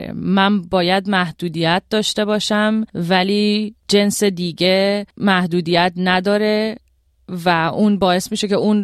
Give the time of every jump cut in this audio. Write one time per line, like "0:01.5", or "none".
0:02.9
0:05.1